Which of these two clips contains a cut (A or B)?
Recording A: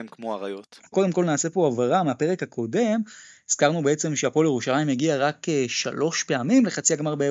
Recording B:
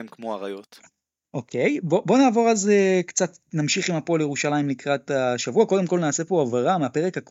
A